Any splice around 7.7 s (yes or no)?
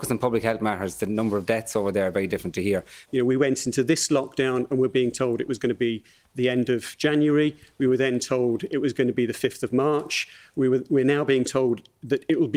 no